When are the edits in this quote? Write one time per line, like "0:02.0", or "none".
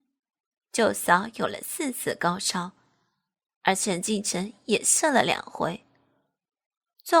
none